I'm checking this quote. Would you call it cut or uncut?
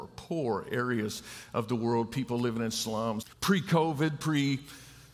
cut